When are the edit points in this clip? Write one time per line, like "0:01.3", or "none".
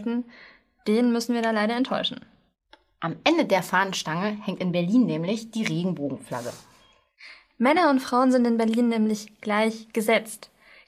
none